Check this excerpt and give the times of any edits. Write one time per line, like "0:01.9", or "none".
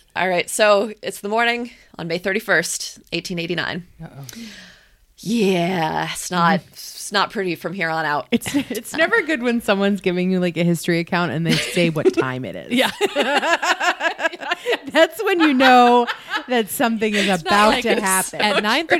0:01.9